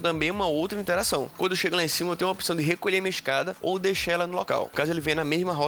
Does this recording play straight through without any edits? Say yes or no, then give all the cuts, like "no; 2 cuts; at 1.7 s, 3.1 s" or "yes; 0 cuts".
no; 2 cuts; at 1.3 s, 4.7 s